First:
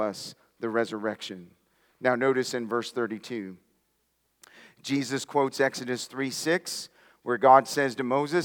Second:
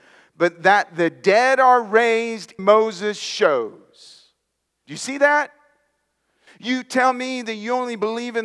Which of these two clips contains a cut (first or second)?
second